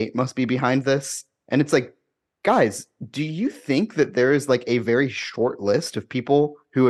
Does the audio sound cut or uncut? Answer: uncut